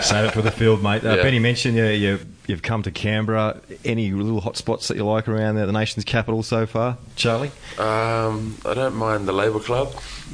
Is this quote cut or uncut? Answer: uncut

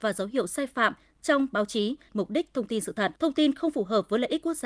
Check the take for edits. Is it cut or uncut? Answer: cut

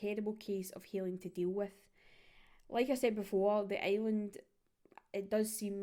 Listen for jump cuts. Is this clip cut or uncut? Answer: uncut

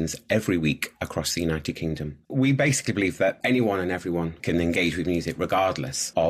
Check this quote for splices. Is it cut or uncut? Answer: cut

